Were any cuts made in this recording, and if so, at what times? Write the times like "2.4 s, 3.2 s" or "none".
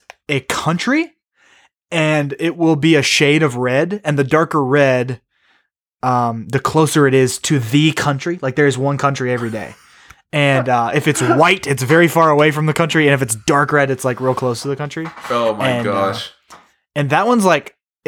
none